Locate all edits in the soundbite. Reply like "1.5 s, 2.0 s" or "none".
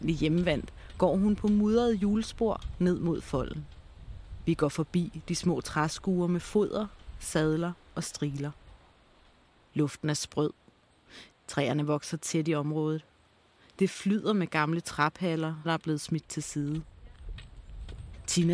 11.3 s, 15.6 s

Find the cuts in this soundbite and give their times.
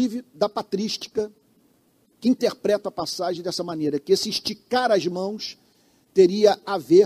none

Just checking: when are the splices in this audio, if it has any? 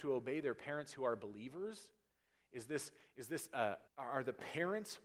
3.9 s

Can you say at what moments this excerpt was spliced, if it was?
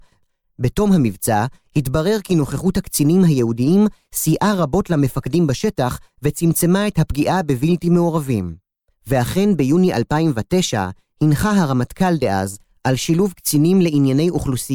8.9 s, 12.7 s

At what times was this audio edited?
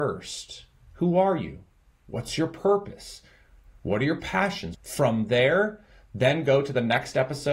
4.7 s

